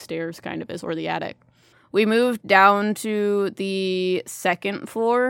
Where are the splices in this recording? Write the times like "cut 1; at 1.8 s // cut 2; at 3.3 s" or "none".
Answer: none